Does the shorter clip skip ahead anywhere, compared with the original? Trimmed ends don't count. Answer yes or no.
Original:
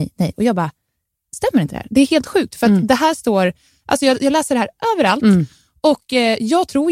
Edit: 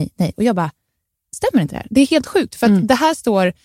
no